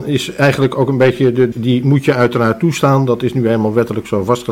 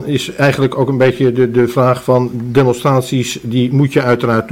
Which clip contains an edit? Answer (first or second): first